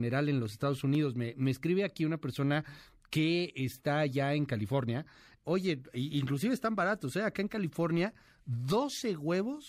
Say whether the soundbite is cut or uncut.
cut